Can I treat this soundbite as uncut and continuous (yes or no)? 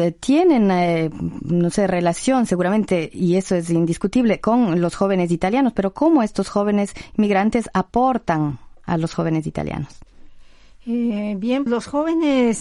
no